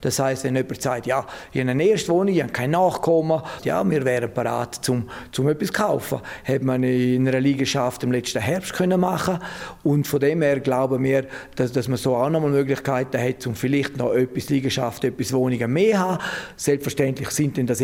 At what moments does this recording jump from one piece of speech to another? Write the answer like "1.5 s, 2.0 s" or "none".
3.6 s

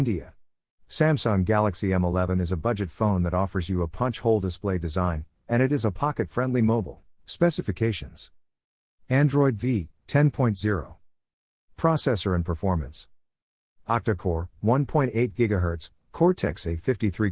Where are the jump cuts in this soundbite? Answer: 7.1 s

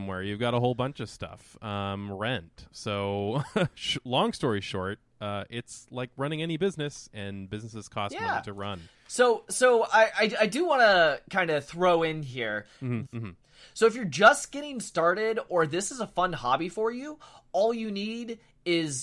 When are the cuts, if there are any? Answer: 8.9 s, 13.1 s

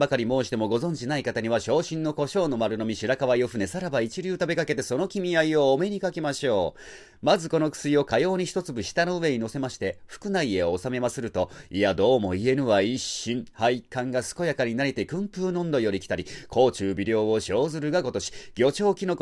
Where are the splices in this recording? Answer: none

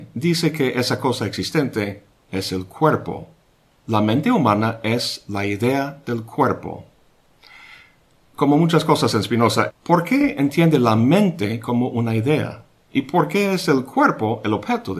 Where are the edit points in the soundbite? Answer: 9.7 s

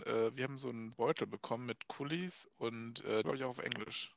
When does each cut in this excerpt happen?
0.9 s, 3.2 s

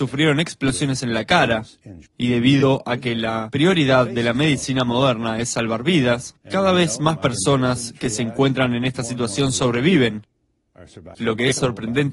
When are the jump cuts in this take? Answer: 2.1 s, 6.4 s, 11.1 s

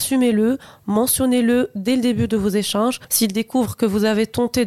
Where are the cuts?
3.1 s

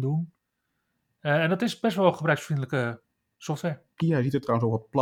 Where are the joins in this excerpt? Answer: 4.0 s

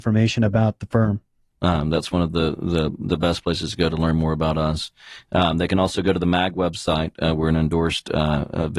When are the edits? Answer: 1.5 s

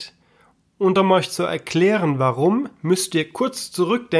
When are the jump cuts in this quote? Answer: none

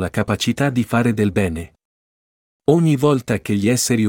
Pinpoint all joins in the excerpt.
none

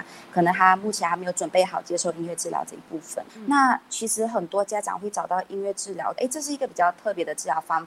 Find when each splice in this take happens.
3.3 s, 6.2 s

